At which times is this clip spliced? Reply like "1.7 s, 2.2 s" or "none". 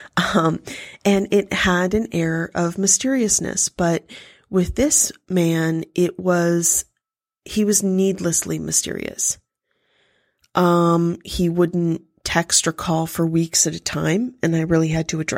11.2 s